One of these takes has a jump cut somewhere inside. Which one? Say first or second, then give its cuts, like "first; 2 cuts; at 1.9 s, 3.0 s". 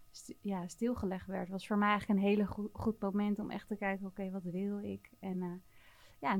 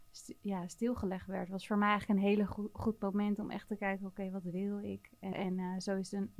second; 1 cut; at 5.3 s